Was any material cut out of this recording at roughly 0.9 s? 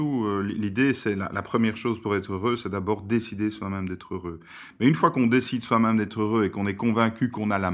no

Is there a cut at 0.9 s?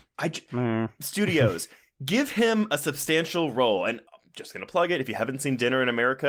no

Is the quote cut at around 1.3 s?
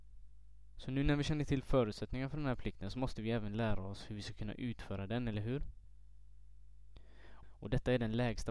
no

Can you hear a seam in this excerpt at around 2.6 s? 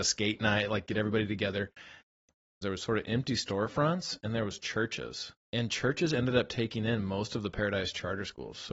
yes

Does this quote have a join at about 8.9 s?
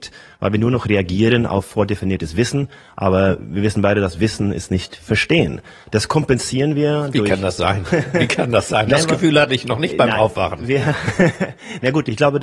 no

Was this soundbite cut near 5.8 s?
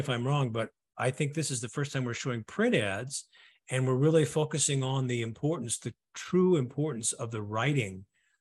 no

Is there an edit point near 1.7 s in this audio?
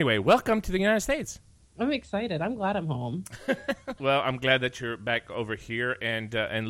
yes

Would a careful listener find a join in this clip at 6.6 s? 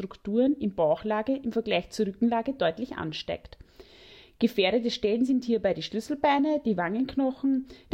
no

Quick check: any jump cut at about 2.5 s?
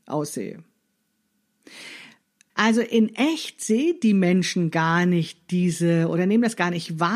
yes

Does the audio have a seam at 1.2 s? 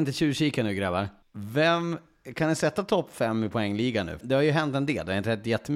yes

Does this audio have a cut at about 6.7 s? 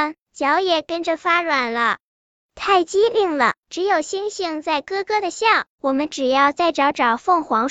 no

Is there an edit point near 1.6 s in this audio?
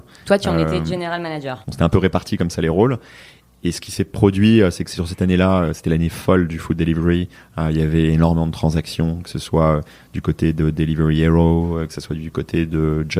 yes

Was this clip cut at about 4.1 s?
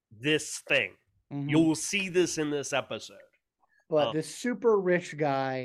yes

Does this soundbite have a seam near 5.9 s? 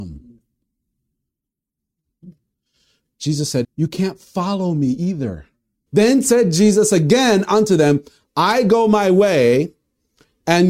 yes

